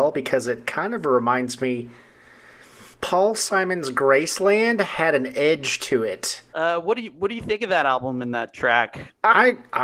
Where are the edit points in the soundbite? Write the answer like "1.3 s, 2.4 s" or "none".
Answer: 2.9 s, 6.5 s